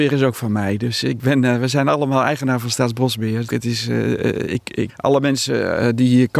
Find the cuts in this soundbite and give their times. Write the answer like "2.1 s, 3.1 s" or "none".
3.5 s, 4.9 s